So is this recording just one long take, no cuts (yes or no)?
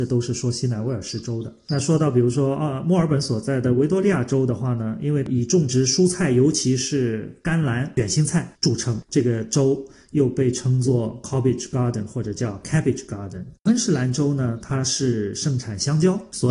yes